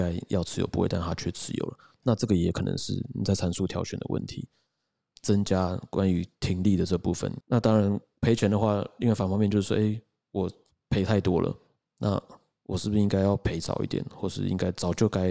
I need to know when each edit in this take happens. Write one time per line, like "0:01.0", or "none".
0:05.2